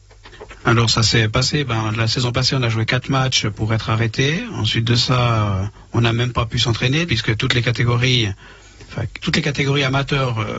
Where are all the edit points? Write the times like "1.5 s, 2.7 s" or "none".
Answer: 7.1 s, 9.2 s